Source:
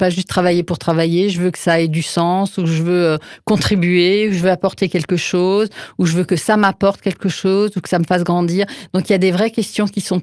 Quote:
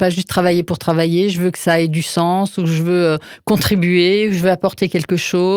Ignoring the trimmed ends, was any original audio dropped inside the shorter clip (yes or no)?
no